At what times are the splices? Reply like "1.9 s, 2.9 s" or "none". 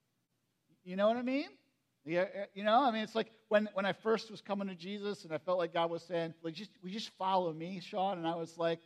6.4 s

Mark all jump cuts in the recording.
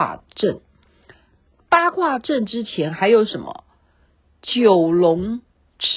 none

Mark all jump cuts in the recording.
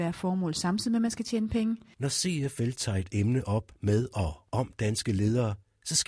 1.9 s

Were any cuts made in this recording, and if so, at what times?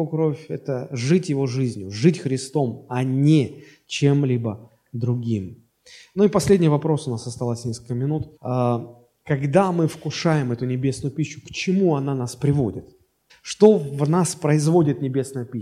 8.4 s, 13.3 s

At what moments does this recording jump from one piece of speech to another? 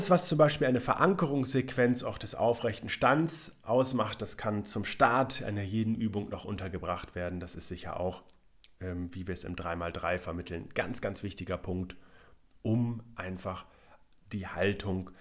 none

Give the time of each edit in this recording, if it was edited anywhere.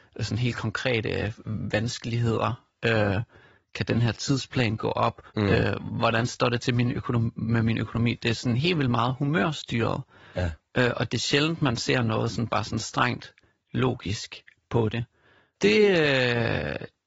5.3 s

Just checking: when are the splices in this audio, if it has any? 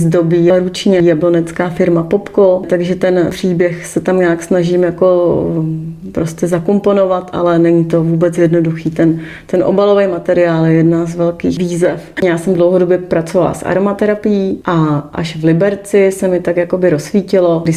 12.2 s

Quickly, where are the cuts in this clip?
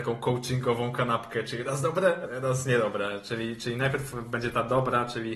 2.3 s

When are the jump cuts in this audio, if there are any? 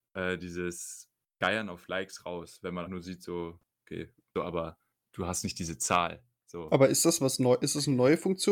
2.9 s, 4.3 s

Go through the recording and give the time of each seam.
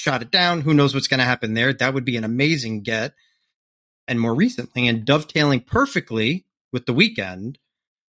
none

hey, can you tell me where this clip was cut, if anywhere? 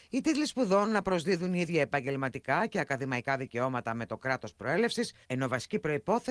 5.2 s

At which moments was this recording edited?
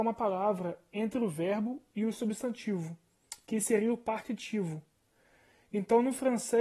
none

